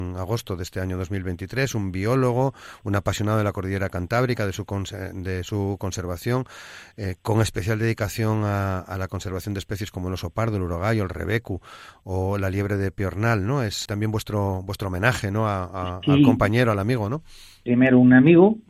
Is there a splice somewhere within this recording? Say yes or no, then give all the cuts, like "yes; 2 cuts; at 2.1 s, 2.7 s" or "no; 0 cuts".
yes; 1 cut; at 13.9 s